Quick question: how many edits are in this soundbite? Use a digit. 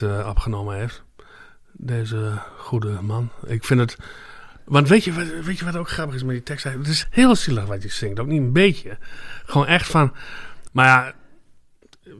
2